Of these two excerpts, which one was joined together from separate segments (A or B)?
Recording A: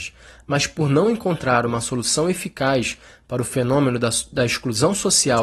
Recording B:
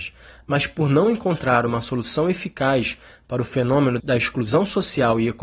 B